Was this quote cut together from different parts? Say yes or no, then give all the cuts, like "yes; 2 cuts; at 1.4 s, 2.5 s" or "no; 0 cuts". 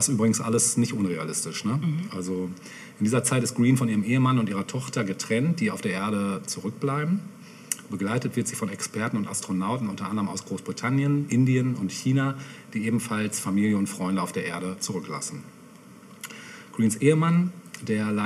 no; 0 cuts